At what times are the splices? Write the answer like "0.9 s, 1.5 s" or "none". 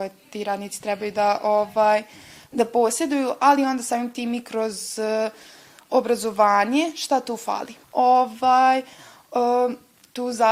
7.8 s